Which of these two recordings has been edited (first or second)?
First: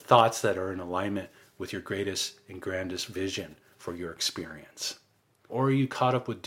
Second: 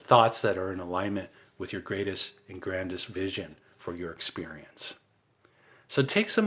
first